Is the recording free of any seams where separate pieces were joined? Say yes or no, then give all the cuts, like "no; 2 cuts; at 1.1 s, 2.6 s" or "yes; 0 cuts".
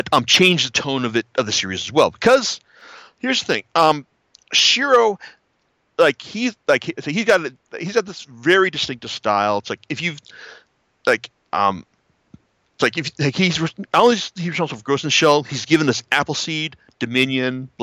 yes; 0 cuts